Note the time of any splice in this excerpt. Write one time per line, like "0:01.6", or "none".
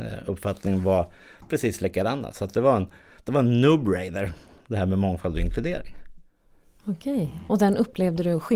none